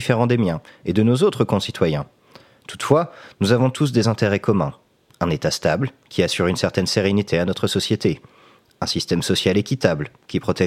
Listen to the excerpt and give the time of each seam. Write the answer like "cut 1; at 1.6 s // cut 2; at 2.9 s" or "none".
none